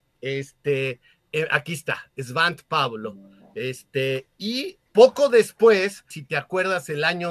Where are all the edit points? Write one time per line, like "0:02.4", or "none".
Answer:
0:04.9
0:06.1